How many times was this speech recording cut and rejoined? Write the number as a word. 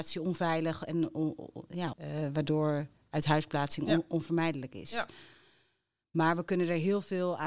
one